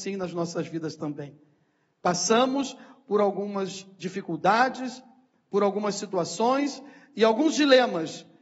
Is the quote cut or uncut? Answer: uncut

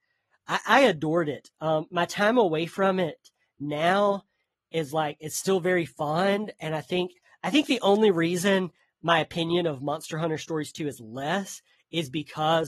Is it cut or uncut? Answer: uncut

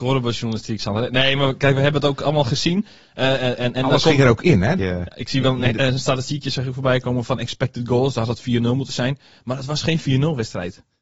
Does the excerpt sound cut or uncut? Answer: cut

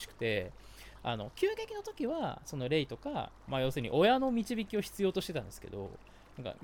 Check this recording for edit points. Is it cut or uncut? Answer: cut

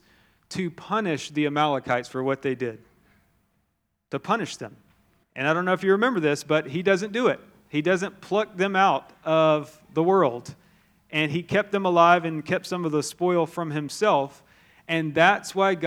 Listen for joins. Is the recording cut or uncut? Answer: cut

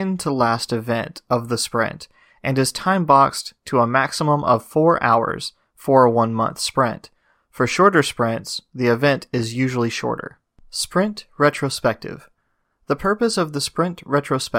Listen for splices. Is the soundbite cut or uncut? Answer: uncut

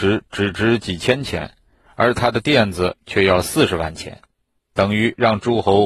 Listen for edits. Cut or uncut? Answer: uncut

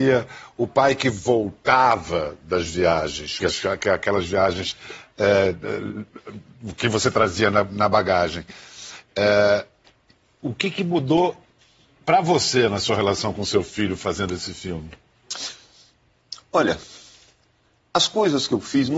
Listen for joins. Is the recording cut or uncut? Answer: cut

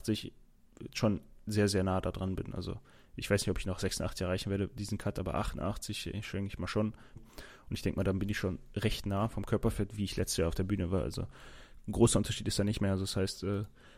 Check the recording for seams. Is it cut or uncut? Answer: cut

